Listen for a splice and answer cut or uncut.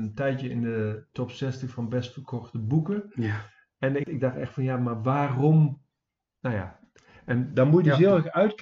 cut